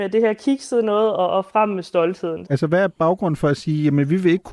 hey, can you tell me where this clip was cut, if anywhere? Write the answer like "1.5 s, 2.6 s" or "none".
2.4 s